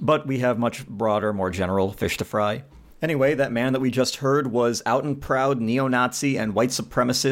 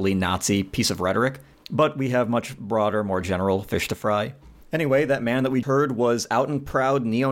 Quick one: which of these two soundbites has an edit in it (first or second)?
second